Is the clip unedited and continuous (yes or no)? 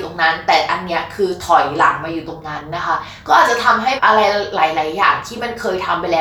yes